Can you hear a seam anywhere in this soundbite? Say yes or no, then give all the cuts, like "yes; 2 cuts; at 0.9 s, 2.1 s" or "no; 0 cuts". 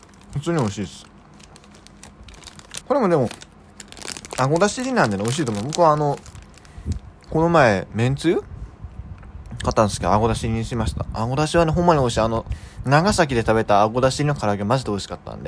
yes; 1 cut; at 2.8 s